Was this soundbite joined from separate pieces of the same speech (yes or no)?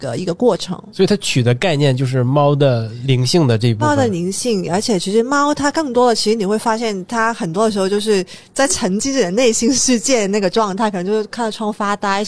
no